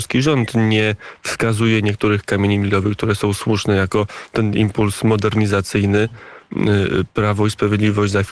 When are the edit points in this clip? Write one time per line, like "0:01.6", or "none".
none